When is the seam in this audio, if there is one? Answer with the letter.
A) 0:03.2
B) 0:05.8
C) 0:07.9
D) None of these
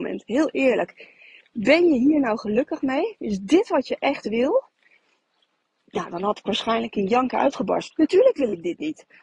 C